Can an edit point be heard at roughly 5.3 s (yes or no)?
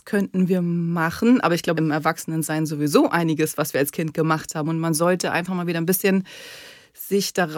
no